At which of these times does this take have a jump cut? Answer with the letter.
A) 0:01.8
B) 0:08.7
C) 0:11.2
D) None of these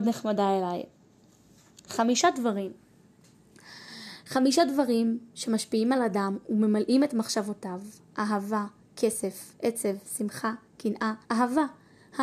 C